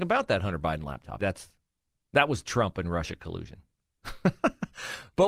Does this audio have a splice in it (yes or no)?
yes